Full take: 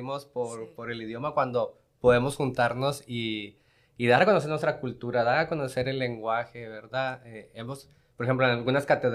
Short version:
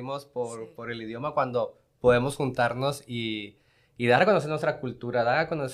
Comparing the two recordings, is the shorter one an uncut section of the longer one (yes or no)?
yes